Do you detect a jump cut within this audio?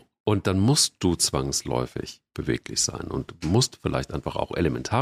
no; 0 cuts

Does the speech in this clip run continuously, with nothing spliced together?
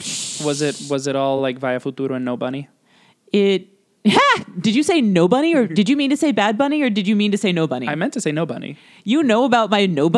yes; 0 cuts

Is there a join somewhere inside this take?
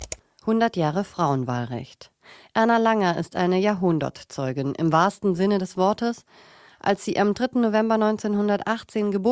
no; 0 cuts

